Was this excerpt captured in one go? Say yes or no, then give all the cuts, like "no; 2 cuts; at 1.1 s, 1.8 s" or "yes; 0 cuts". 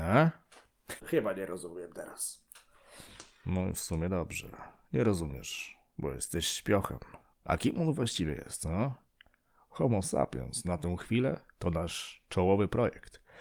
no; 2 cuts; at 1.0 s, 7.3 s